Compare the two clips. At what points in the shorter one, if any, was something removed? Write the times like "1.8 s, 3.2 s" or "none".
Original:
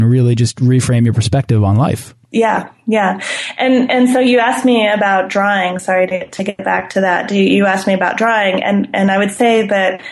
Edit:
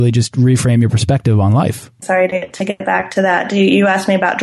2.0 s